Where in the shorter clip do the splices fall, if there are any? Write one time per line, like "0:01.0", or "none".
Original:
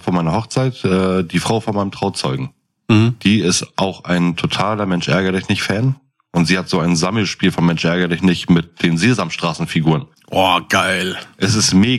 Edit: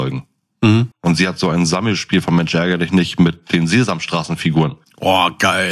0:00.9